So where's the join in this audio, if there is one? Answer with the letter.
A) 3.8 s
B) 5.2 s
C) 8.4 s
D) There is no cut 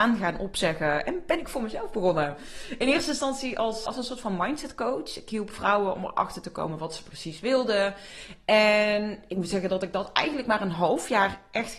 A